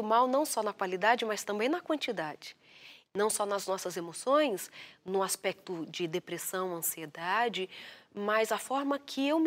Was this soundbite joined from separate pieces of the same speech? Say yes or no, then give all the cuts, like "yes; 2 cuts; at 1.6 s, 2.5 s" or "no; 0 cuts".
yes; 1 cut; at 3.1 s